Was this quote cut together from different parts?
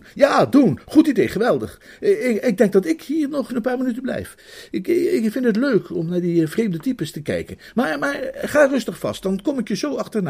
yes; 1 cut; at 3.5 s

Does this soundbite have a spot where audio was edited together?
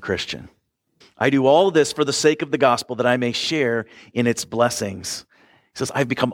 yes; 1 cut; at 1.0 s

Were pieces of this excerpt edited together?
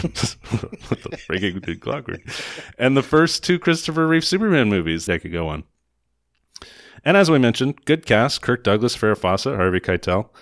yes; 1 cut; at 5.1 s

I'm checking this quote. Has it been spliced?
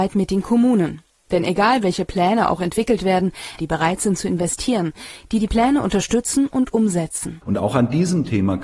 yes; 2 cuts; at 3.6 s, 7.4 s

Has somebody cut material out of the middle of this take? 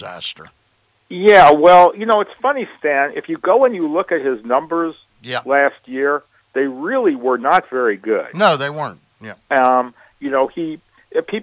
no; 0 cuts

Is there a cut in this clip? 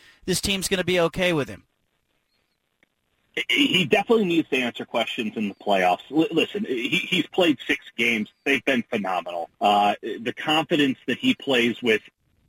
yes; 1 cut; at 9.5 s

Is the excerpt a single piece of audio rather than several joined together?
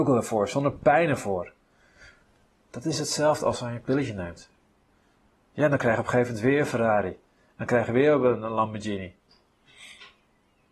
yes; 0 cuts

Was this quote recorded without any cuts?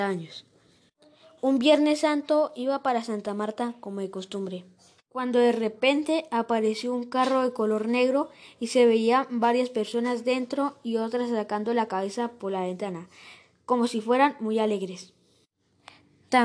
yes; 0 cuts

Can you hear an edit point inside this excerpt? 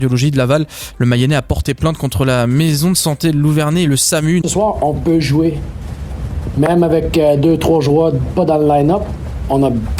yes; 1 cut; at 4.4 s

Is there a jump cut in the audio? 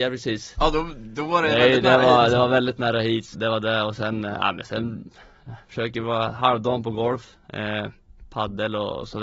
yes; 1 cut; at 3.3 s

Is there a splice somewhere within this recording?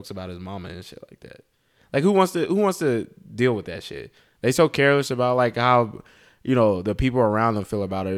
no; 0 cuts

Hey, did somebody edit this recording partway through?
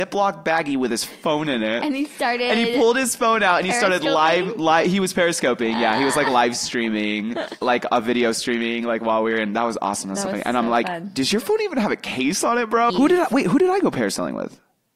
yes; 2 cuts; at 7.6 s, 12.9 s

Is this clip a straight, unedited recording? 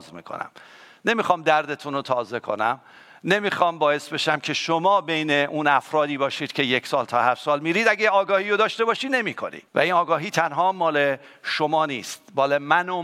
no; 1 cut; at 9.7 s

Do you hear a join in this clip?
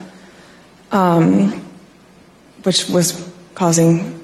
no; 0 cuts

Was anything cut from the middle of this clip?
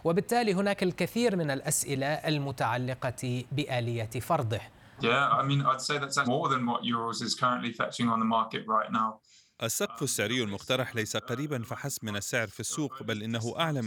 yes; 2 cuts; at 5.0 s, 6.2 s

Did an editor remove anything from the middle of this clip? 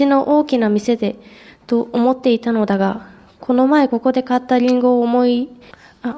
yes; 1 cut; at 3.9 s

